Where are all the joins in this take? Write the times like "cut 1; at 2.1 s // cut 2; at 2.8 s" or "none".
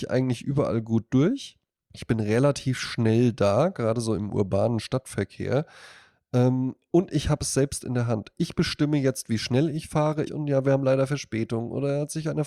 cut 1; at 10.3 s

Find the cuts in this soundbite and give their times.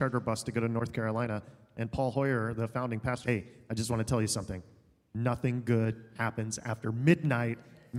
cut 1; at 3.2 s

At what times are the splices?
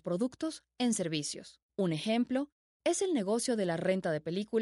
cut 1; at 1.6 s

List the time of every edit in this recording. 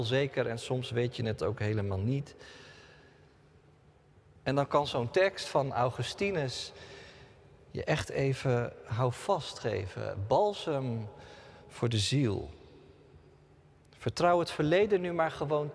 none

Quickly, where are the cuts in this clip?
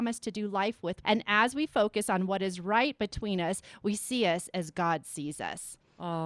cut 1; at 1.0 s

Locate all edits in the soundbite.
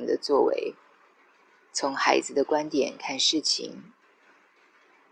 none

